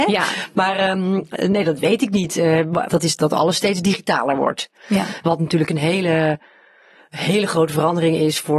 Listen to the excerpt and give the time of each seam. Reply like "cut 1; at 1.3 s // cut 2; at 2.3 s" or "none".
cut 1; at 2.9 s // cut 2; at 4.8 s